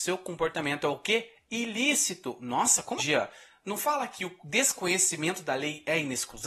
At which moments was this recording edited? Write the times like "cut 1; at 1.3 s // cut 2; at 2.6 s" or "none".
cut 1; at 3.0 s